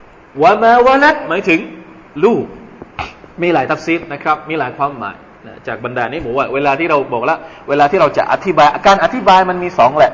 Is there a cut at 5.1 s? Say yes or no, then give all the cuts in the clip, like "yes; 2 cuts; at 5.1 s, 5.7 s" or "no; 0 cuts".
no; 1 cut; at 3.3 s